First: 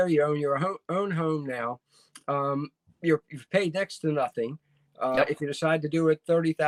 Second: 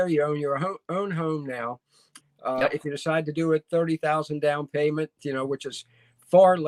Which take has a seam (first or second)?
second